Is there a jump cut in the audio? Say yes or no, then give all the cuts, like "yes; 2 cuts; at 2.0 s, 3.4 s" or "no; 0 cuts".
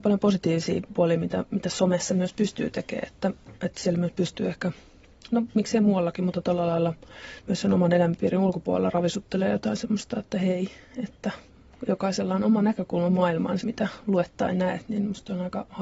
yes; 2 cuts; at 5.3 s, 13.6 s